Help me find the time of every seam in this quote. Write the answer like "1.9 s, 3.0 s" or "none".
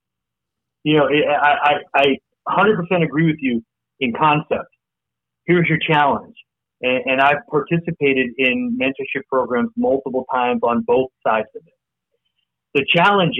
none